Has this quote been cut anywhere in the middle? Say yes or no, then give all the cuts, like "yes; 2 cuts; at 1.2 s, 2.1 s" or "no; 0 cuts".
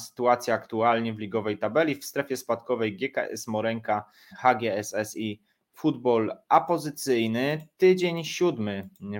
yes; 1 cut; at 4.3 s